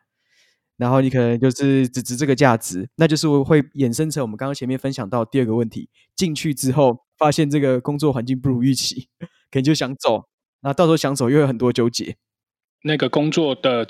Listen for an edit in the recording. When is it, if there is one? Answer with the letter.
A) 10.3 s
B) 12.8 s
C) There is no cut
B